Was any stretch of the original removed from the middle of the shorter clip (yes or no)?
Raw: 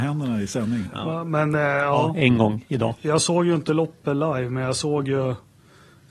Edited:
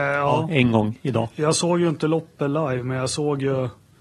no